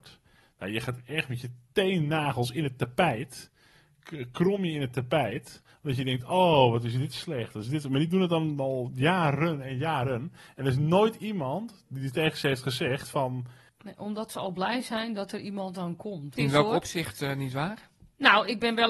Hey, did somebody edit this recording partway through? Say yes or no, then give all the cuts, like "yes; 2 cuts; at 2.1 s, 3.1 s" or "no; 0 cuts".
yes; 2 cuts; at 13.7 s, 16.4 s